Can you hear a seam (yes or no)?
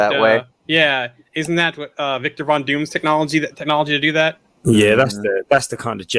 yes